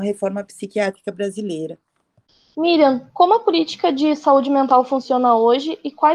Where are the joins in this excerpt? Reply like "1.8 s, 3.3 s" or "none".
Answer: none